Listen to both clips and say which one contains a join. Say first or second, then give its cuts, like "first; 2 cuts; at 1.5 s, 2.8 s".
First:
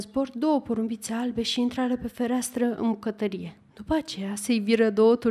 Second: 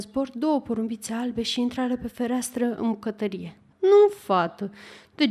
second; 1 cut; at 3.7 s